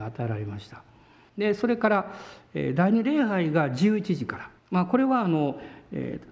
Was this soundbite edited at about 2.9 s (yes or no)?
no